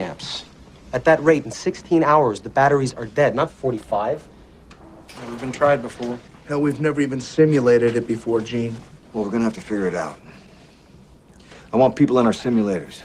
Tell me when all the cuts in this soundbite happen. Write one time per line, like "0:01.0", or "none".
0:05.1